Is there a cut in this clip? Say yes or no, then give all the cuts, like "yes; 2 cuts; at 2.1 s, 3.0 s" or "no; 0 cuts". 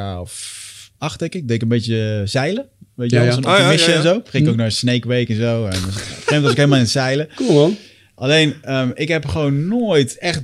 no; 0 cuts